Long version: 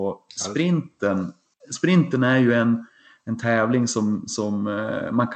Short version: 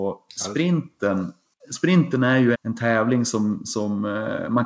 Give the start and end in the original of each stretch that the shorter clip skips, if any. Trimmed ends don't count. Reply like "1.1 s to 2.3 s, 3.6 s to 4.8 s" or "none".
2.5 s to 3.2 s